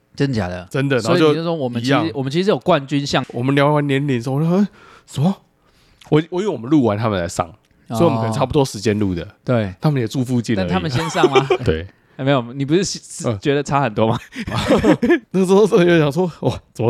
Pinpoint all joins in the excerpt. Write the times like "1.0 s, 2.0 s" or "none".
11.6 s, 15.2 s